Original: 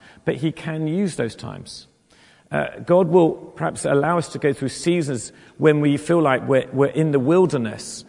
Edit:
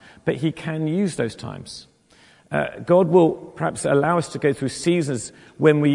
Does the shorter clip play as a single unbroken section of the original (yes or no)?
yes